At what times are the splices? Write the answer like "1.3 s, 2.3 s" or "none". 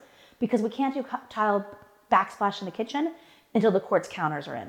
none